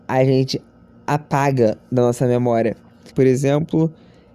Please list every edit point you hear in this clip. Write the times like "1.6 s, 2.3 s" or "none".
3.1 s

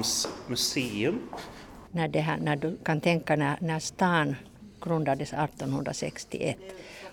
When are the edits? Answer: 1.9 s

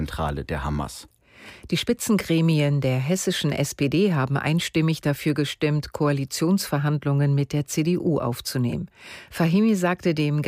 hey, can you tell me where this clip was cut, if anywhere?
9.3 s

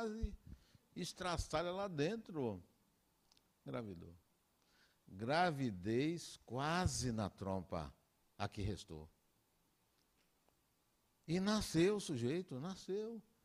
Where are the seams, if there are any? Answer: none

